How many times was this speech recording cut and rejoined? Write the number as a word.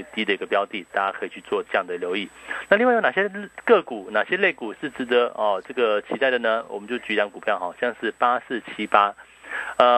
zero